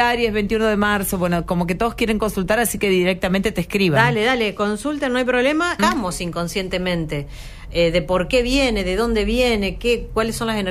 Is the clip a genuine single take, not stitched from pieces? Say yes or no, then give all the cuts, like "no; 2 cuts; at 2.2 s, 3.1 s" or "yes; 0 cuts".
no; 1 cut; at 5.8 s